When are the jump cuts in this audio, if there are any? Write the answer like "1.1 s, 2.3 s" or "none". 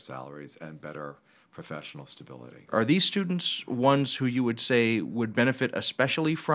none